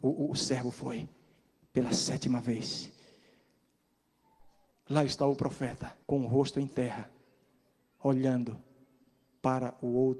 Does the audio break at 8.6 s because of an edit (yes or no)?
no